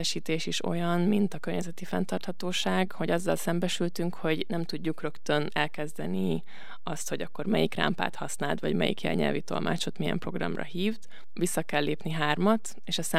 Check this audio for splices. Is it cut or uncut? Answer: uncut